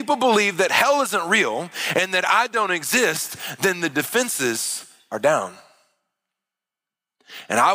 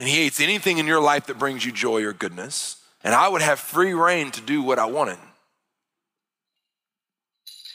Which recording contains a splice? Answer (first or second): second